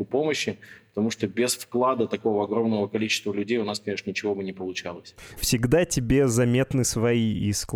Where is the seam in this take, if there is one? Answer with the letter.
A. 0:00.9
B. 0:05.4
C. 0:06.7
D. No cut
B